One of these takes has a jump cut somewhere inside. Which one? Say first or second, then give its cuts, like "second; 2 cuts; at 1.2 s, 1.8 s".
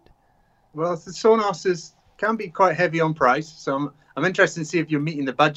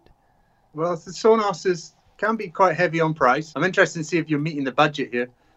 second; 1 cut; at 3.5 s